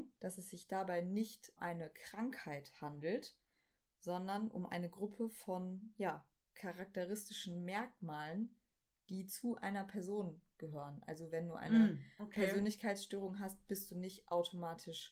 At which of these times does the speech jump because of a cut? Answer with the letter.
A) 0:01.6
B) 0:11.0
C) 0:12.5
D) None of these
A